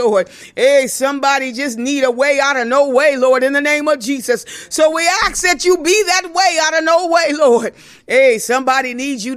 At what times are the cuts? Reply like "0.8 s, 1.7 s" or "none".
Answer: none